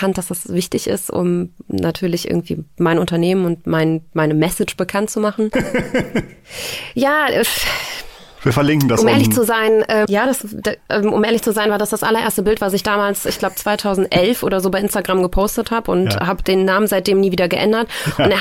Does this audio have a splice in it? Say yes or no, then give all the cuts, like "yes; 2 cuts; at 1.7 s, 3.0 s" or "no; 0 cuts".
yes; 2 cuts; at 5.5 s, 10.1 s